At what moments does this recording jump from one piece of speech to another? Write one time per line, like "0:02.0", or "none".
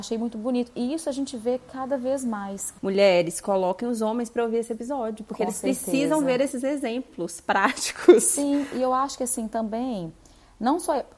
none